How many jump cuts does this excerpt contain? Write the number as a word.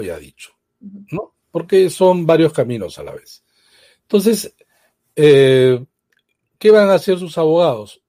zero